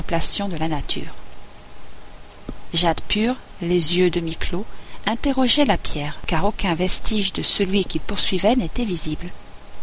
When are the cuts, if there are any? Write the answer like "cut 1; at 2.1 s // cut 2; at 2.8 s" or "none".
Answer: none